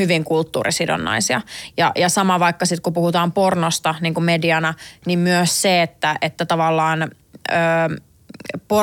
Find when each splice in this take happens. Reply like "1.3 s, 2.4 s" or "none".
1.7 s